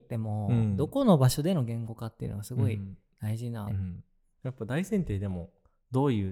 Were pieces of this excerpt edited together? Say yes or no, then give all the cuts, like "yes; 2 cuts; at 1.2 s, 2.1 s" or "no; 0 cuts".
yes; 1 cut; at 3.7 s